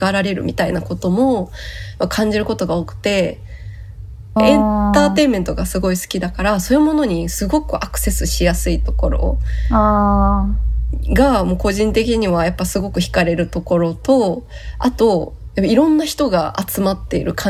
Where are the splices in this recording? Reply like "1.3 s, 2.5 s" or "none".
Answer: 4.4 s